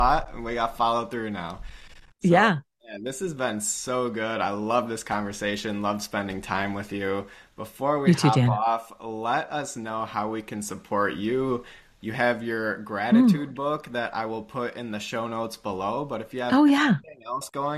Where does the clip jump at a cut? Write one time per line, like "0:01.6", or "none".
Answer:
none